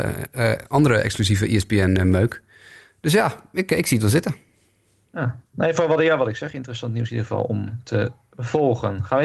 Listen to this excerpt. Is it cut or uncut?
uncut